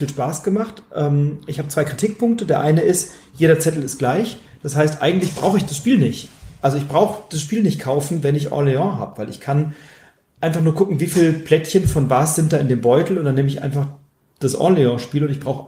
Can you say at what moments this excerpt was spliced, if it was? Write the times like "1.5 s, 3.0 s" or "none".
none